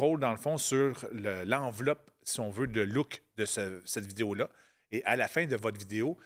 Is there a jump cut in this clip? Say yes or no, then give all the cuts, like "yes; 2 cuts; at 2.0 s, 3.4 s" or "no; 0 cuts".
no; 0 cuts